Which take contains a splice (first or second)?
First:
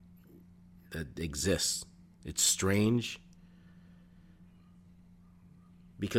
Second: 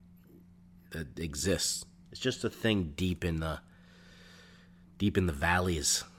second